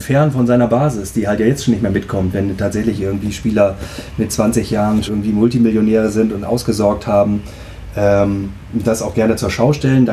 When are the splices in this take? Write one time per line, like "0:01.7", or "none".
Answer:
0:05.1